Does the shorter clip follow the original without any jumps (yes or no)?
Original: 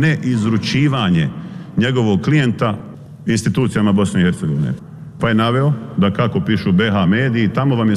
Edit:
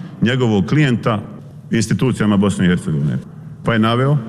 yes